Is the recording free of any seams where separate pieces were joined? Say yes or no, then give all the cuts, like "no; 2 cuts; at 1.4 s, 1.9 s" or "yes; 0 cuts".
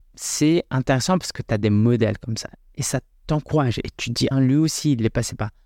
no; 1 cut; at 4.3 s